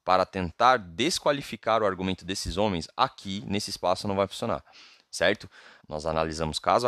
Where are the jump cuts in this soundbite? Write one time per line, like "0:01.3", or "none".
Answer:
0:05.8